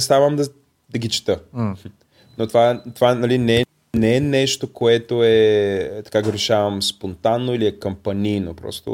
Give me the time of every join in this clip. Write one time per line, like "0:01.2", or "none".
none